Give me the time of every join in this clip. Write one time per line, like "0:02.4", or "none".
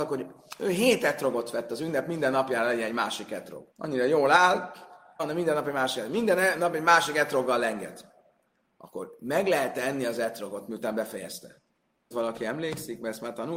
0:03.7
0:05.2
0:12.1